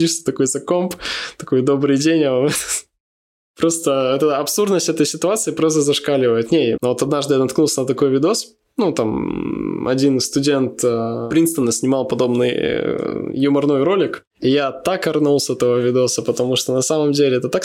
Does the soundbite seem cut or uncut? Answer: cut